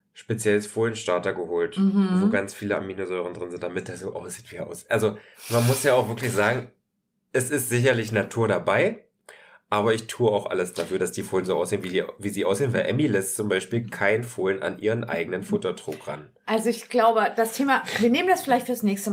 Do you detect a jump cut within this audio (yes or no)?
no